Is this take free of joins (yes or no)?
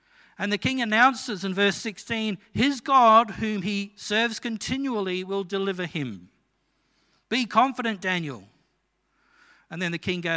yes